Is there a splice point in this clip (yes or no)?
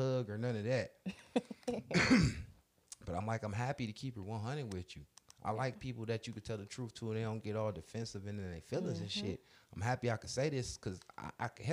no